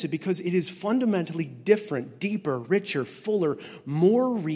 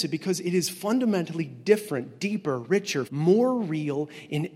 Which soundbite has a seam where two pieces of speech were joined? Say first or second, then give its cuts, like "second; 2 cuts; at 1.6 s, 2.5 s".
second; 1 cut; at 3.1 s